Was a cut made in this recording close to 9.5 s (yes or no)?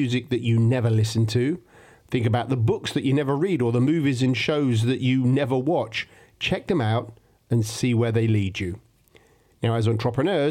yes